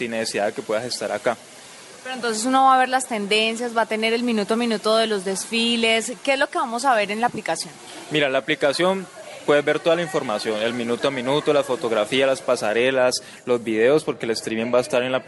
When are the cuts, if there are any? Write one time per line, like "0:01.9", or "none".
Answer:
none